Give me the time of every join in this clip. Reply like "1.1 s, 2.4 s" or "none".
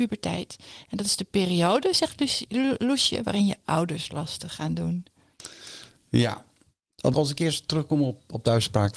7.1 s